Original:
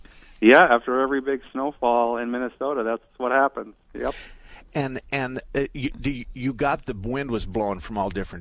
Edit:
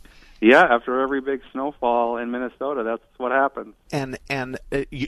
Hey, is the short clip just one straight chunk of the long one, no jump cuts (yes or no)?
no